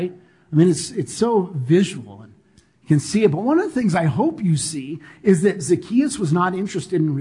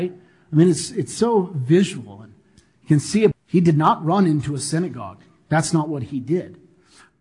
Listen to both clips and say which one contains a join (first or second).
second